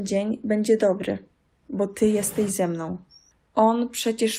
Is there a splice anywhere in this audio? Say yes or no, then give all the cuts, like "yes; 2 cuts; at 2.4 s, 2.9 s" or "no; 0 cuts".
no; 0 cuts